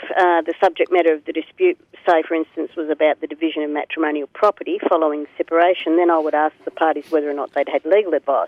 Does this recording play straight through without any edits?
yes; 0 cuts

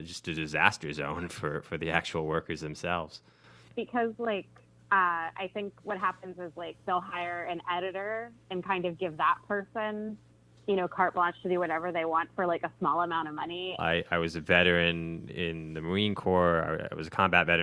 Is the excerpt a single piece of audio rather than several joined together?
no; 1 cut; at 13.8 s

